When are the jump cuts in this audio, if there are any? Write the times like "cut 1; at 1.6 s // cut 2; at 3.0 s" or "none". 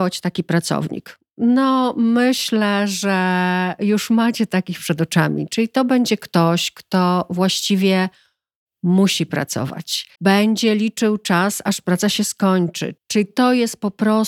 cut 1; at 10.1 s // cut 2; at 13.0 s